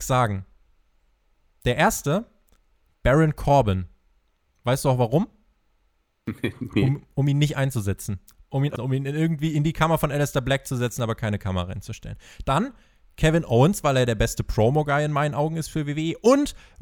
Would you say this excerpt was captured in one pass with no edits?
no; 1 cut; at 8.8 s

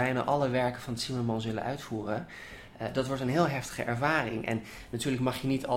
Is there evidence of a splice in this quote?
no; 0 cuts

